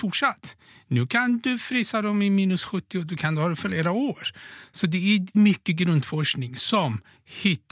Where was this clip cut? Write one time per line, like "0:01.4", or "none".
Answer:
0:05.3